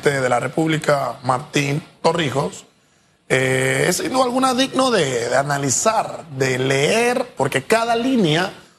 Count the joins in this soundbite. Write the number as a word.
one